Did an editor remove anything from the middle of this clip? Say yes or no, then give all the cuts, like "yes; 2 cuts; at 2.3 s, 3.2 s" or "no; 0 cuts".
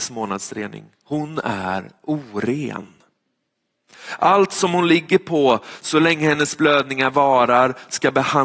no; 0 cuts